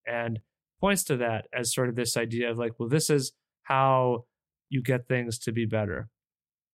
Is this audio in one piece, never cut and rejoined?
yes; 0 cuts

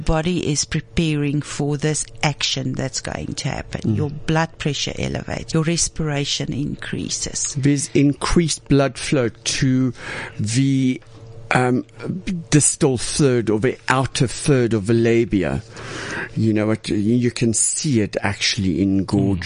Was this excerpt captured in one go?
no; 1 cut; at 5.5 s

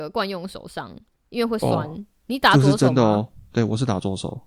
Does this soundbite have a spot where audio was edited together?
no; 0 cuts

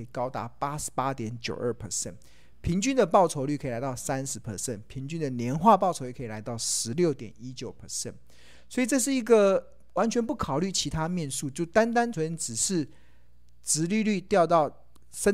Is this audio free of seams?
no; 1 cut; at 12.1 s

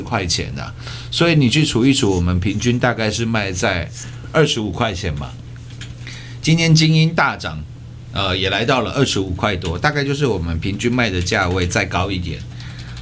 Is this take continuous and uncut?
yes; 0 cuts

